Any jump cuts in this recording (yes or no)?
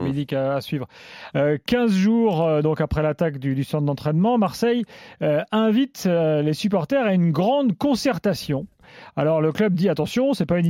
yes